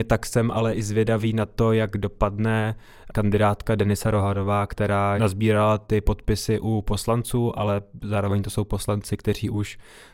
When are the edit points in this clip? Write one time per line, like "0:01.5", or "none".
0:05.2